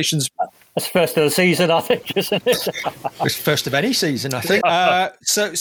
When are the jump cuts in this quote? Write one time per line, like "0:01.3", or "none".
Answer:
0:04.6